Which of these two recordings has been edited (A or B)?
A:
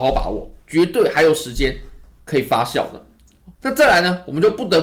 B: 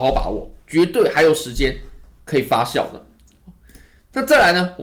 A